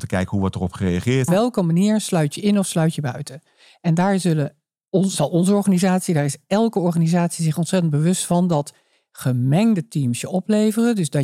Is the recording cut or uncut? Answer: cut